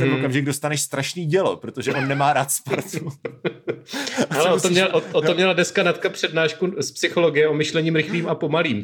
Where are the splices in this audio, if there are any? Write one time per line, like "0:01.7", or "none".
none